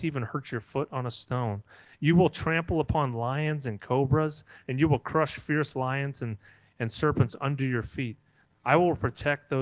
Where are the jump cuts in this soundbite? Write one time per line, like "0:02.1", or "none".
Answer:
0:08.5